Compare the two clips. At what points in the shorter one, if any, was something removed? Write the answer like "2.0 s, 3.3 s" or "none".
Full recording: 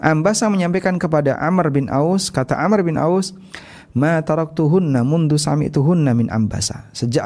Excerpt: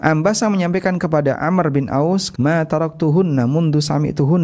2.3 s